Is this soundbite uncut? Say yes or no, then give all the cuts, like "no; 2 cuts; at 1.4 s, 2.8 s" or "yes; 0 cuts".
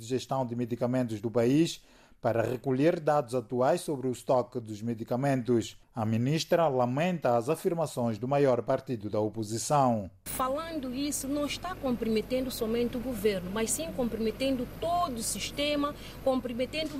yes; 0 cuts